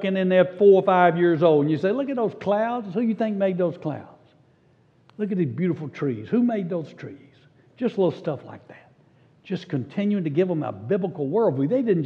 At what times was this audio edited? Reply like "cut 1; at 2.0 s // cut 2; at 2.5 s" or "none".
none